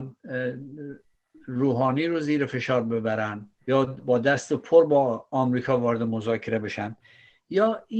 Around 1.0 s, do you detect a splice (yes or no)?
no